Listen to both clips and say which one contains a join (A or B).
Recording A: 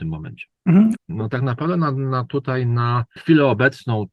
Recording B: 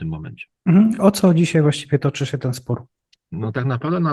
A